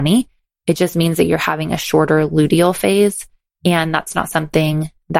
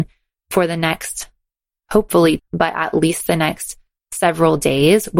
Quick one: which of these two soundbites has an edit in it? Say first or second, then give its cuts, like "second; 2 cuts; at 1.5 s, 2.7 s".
second; 1 cut; at 2.4 s